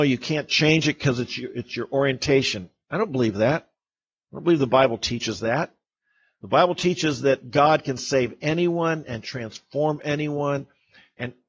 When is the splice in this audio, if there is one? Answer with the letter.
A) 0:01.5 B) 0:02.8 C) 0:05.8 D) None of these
D